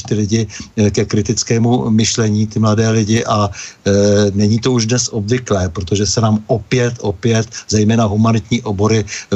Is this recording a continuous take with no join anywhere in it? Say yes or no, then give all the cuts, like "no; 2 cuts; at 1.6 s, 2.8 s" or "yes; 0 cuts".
yes; 0 cuts